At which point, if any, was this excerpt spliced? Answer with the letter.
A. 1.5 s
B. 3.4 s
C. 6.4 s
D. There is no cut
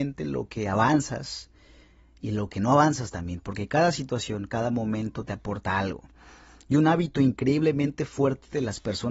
D